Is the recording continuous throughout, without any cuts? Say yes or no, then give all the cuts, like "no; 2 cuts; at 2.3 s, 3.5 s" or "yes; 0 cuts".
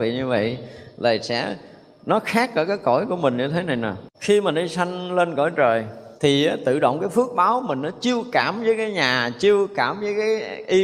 no; 2 cuts; at 4.1 s, 6.2 s